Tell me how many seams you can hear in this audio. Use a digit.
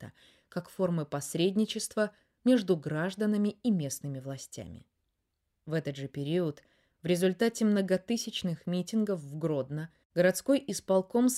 0